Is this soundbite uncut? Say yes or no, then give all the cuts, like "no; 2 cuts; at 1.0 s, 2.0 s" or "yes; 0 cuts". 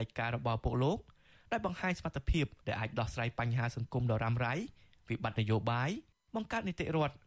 yes; 0 cuts